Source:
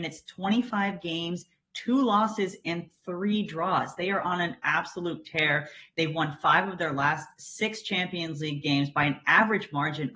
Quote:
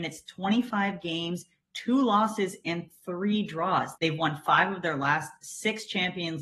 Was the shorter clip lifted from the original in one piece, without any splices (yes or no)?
no